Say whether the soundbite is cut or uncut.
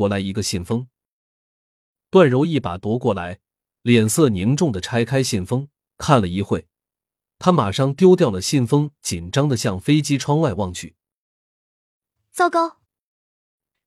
uncut